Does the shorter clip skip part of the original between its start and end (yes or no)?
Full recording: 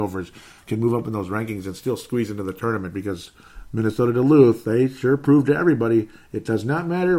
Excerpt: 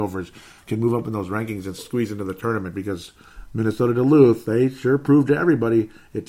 yes